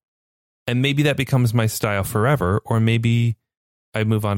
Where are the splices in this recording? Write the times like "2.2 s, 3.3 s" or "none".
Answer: none